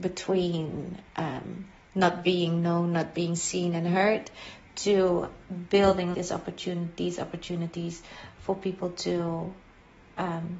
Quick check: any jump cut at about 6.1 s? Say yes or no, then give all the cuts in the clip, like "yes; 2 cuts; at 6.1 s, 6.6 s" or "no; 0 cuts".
yes; 1 cut; at 6.1 s